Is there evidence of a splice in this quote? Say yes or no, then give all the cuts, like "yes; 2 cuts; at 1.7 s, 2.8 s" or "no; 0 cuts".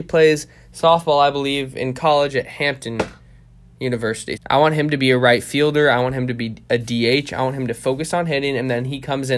yes; 1 cut; at 4.4 s